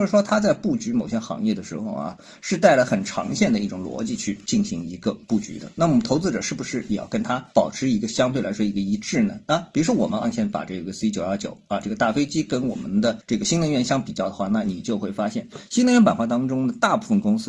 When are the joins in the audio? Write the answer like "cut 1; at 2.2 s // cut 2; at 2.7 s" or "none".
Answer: cut 1; at 10.2 s